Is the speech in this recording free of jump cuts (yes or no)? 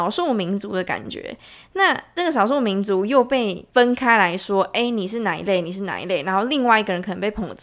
yes